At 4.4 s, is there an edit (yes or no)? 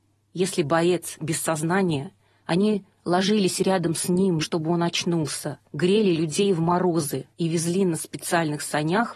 yes